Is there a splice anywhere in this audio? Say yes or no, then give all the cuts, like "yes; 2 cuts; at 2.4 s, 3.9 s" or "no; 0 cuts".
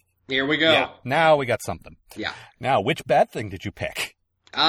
yes; 1 cut; at 2.1 s